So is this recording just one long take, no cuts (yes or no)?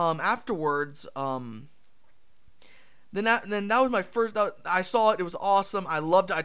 yes